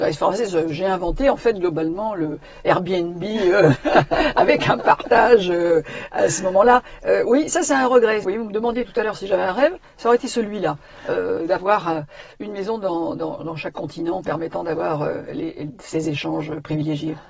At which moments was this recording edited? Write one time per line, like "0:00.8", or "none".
0:08.2